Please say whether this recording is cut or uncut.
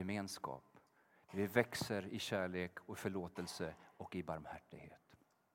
uncut